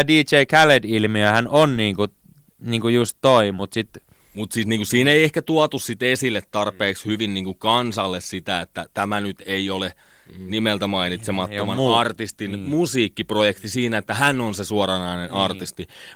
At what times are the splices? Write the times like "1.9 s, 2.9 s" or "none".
none